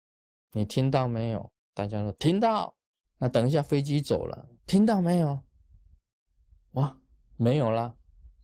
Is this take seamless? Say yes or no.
no